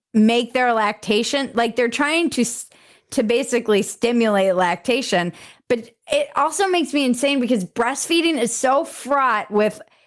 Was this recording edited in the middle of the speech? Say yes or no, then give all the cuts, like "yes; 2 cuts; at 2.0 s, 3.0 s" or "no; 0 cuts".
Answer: no; 0 cuts